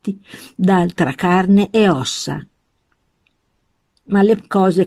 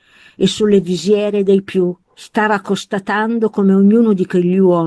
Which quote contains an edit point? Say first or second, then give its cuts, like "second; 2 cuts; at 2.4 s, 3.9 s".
second; 1 cut; at 2.0 s